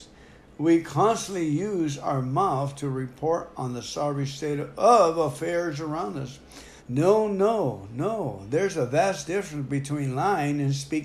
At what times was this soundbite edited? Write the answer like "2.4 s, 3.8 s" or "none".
6.8 s